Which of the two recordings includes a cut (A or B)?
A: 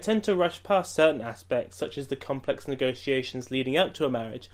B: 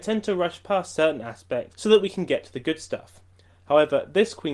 B